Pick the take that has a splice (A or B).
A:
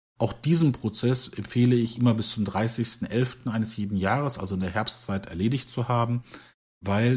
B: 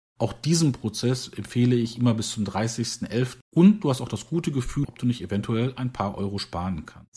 B